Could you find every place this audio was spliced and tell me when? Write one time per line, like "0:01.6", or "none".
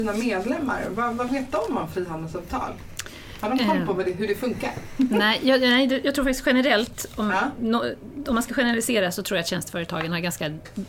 none

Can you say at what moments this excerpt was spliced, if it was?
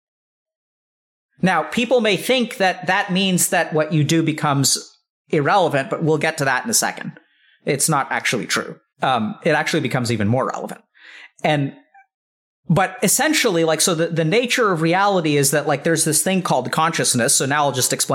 0:08.9

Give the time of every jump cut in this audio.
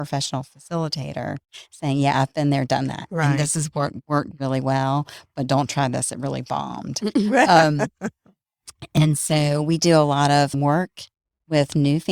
none

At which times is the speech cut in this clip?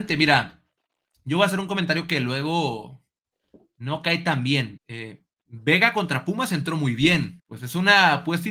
0:04.8
0:07.4

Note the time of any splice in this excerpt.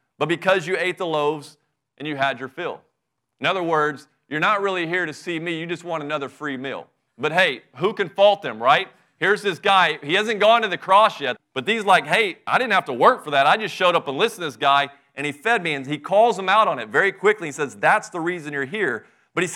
0:11.4

